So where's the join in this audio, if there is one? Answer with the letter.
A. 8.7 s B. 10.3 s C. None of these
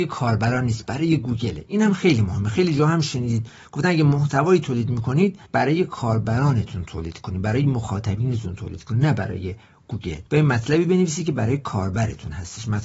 B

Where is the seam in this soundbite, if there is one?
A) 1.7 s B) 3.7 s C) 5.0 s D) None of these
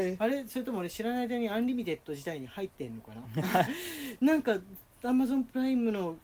B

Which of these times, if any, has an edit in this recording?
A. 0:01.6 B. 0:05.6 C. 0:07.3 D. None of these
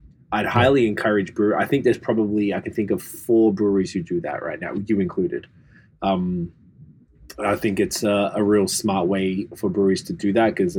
D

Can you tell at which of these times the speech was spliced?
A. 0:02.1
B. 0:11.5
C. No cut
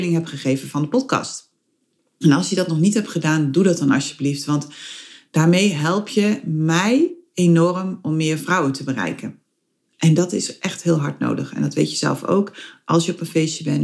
C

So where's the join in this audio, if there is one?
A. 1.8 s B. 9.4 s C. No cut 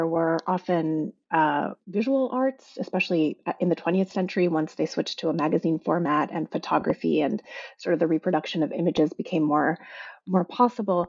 A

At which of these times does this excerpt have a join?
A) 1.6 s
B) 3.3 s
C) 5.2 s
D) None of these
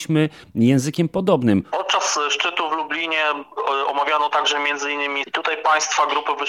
C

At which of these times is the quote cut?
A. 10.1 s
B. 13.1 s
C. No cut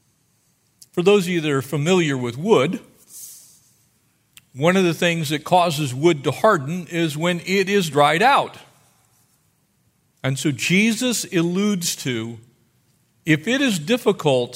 A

